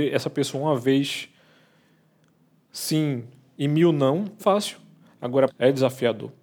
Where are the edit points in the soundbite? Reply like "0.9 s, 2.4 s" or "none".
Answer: 4.4 s, 5.5 s